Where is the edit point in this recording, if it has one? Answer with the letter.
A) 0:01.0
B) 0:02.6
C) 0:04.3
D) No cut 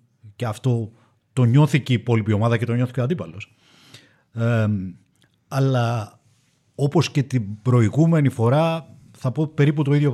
D